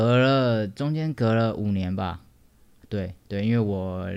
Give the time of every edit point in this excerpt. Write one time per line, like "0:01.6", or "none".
0:03.2